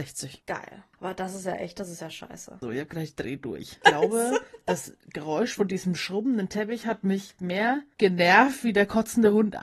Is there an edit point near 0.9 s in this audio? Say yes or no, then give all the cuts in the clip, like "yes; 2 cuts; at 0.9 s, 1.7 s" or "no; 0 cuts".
no; 2 cuts; at 2.6 s, 3.8 s